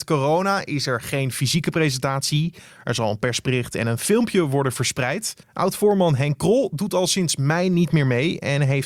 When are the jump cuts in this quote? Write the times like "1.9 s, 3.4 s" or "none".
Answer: 5.4 s